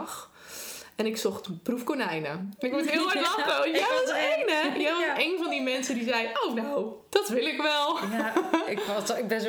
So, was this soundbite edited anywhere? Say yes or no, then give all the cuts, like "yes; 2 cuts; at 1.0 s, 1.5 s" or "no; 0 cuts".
no; 0 cuts